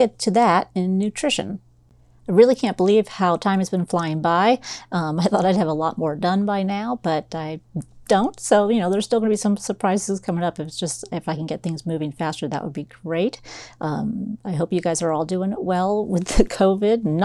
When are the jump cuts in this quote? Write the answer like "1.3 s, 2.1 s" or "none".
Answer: none

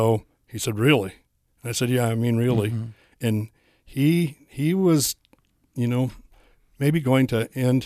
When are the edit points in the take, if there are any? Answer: none

